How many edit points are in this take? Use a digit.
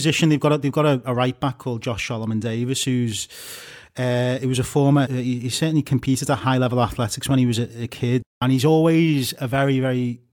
1